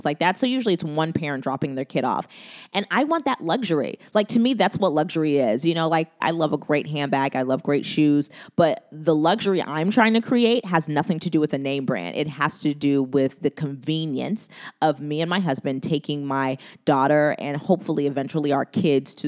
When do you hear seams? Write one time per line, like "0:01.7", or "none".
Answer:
0:06.2